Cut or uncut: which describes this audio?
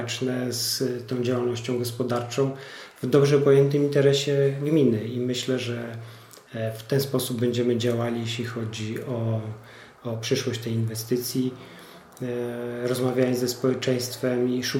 uncut